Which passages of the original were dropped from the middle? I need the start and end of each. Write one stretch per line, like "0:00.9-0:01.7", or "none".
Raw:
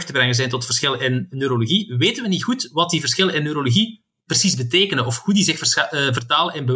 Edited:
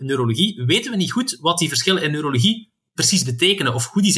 none